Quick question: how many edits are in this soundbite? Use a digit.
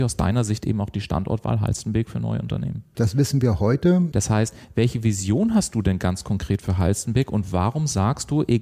2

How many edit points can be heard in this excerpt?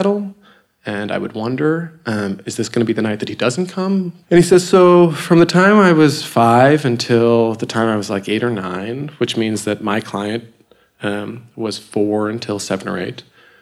1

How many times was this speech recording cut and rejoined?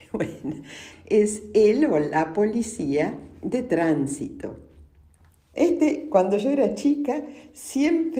2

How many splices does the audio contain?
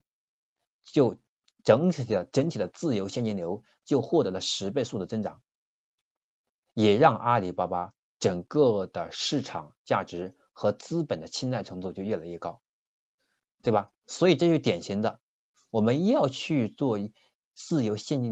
0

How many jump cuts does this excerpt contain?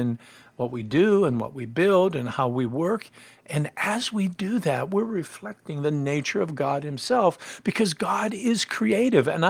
0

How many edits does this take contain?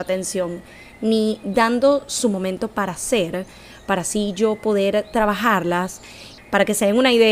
1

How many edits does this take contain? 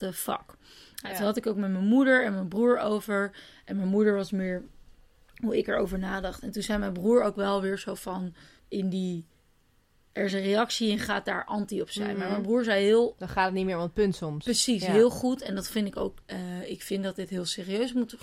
2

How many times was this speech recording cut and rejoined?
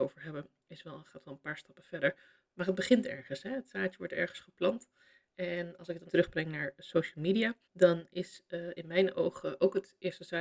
2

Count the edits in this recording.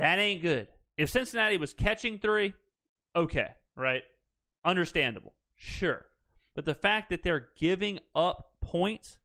1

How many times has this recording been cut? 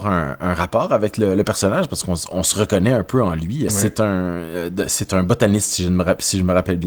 1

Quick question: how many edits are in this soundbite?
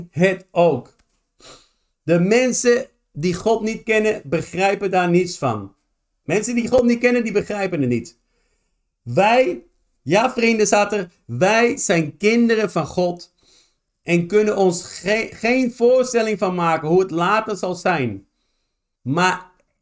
1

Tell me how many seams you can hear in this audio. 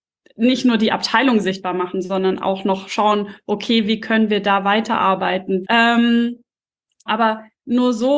2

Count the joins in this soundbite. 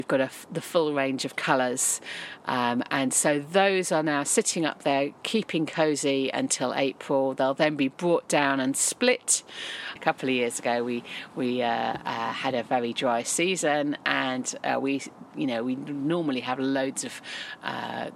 1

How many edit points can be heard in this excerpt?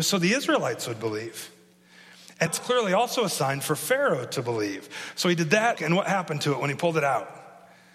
2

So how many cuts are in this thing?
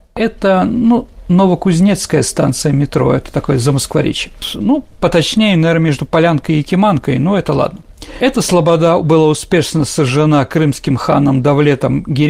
0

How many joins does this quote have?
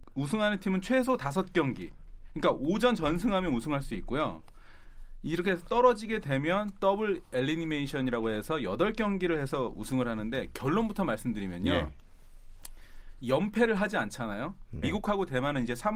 1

